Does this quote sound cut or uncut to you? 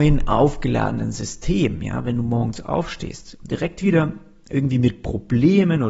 uncut